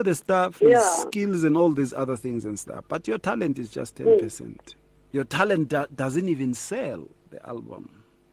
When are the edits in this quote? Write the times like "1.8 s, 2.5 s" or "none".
5.1 s